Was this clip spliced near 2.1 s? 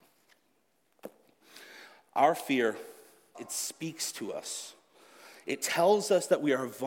no; 1 cut; at 3.3 s

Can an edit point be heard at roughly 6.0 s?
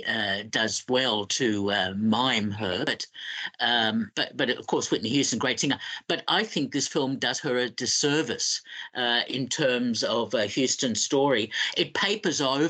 no; 0 cuts

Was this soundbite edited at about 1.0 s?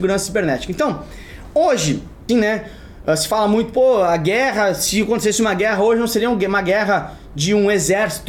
no; 1 cut; at 2.3 s

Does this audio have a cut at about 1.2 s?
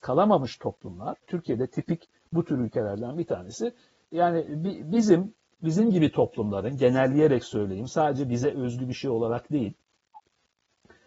yes; 1 cut; at 1.2 s

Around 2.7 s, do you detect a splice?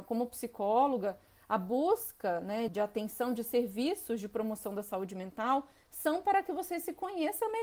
yes; 1 cut; at 2.7 s

